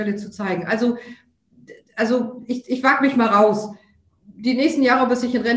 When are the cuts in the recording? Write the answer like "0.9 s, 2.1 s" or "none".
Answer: none